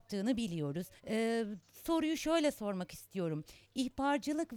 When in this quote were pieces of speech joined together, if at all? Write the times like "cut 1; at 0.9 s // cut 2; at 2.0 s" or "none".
cut 1; at 1.0 s

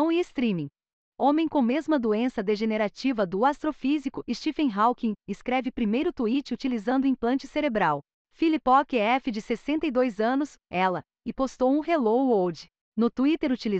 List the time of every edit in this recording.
cut 1; at 1.0 s // cut 2; at 10.6 s

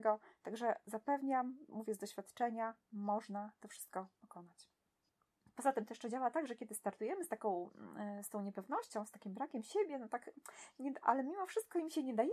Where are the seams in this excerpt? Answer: none

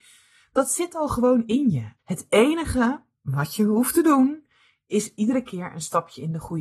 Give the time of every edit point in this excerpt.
cut 1; at 2.0 s

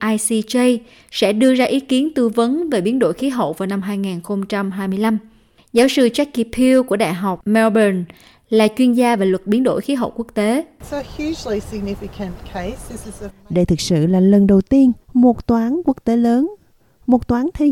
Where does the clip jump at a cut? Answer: cut 1; at 13.3 s // cut 2; at 15.0 s

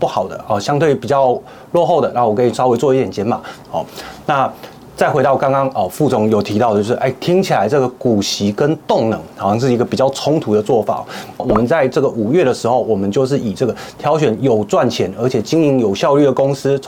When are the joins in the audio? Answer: cut 1; at 3.6 s // cut 2; at 11.4 s

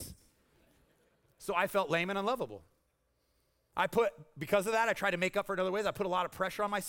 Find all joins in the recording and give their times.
none

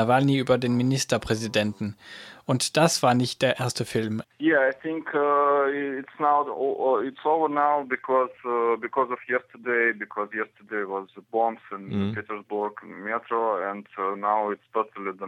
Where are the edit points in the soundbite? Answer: cut 1; at 4.2 s

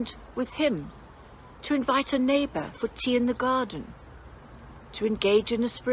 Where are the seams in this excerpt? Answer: cut 1; at 1.6 s

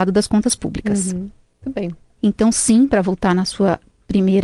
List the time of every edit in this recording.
cut 1; at 2.2 s

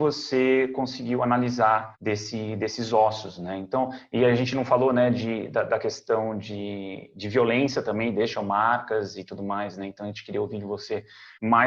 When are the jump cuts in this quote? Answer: none

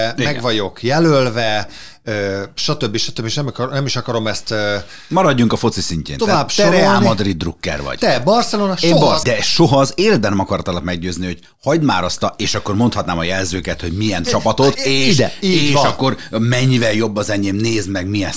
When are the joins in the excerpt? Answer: cut 1; at 9.2 s // cut 2; at 14.8 s

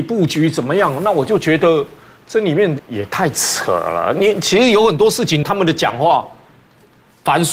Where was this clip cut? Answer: cut 1; at 2.8 s // cut 2; at 5.4 s

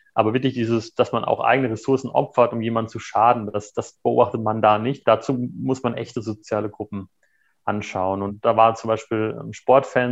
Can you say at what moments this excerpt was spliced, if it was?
none

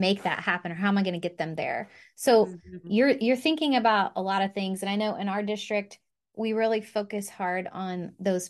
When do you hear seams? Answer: cut 1; at 2.8 s

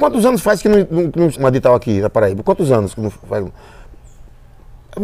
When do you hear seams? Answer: cut 1; at 1.3 s

